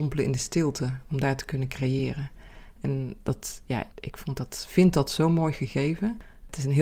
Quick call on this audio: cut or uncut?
cut